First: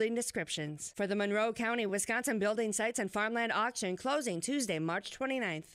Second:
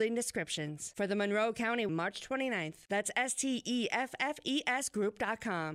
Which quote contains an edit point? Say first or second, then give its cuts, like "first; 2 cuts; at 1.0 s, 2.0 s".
second; 1 cut; at 1.9 s